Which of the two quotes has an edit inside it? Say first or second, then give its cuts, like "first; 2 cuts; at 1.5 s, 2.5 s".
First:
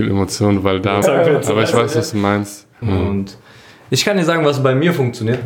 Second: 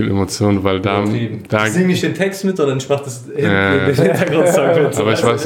first; 2 cuts; at 1.0 s, 2.8 s